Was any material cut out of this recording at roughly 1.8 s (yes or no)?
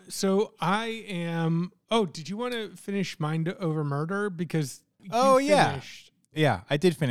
no